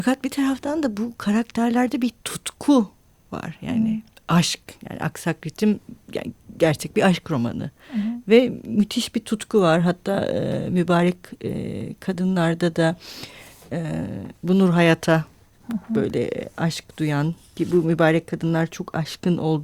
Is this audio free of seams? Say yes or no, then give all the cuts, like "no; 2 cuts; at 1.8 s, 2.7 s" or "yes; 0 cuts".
yes; 0 cuts